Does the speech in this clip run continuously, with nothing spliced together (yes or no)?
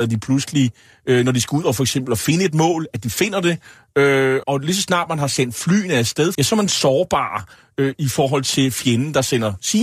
no